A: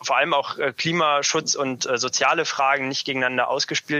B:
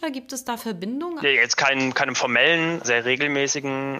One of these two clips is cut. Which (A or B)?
B